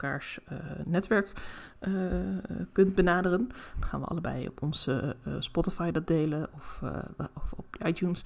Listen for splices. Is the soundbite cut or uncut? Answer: cut